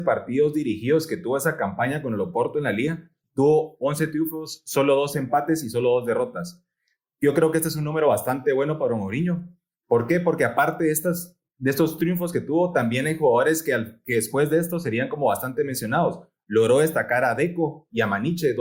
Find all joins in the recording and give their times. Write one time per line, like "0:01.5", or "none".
none